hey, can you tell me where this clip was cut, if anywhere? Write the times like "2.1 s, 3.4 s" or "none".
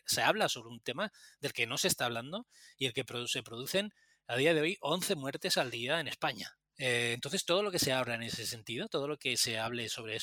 6.7 s